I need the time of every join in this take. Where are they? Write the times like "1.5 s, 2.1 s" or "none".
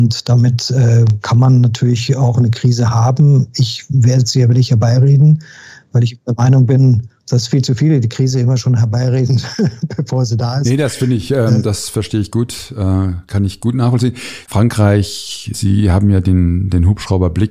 14.5 s, 15.5 s

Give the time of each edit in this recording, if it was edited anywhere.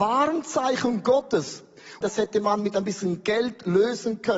2.0 s

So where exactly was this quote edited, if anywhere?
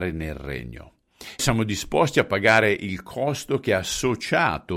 1.4 s

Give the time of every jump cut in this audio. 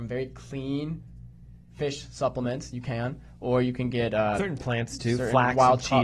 none

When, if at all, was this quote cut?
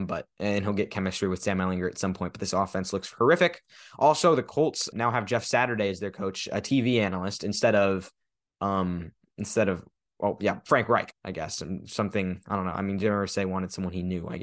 4.9 s, 11.1 s

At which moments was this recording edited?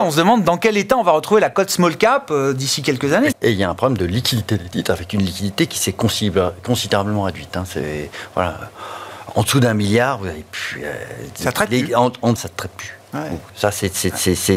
3.3 s, 12.4 s, 13.5 s

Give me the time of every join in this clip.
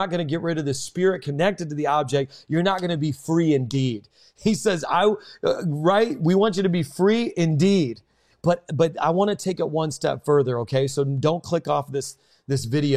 8.3 s

